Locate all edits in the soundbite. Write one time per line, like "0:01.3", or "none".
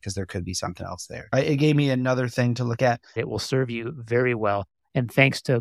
0:03.2